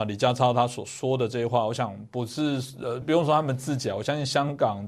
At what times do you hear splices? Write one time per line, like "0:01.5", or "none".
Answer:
0:03.0